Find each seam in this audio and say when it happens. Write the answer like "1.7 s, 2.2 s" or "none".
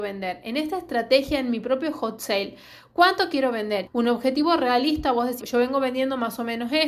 3.9 s, 5.4 s